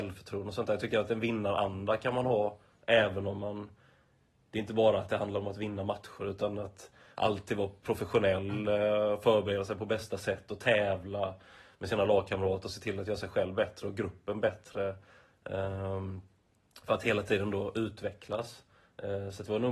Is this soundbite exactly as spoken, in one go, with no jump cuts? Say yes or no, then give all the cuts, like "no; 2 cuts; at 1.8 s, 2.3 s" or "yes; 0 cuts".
yes; 0 cuts